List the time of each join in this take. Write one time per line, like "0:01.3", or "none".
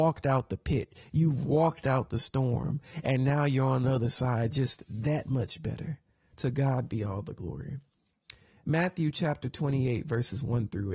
none